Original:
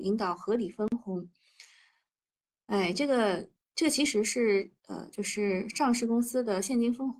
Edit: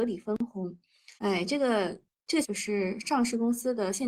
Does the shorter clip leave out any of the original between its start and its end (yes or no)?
yes